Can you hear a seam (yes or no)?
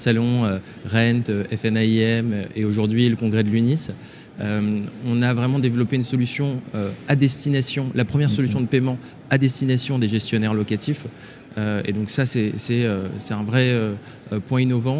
no